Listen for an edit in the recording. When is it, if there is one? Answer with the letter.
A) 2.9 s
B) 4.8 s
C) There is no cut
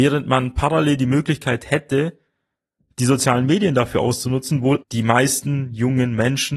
B